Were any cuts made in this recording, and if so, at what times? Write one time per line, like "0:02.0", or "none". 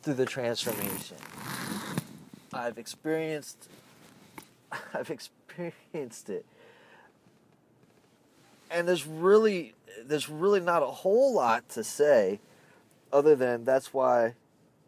none